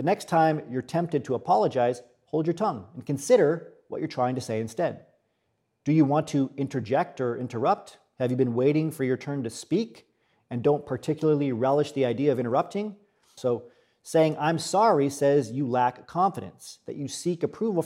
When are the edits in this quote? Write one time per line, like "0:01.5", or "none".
0:13.4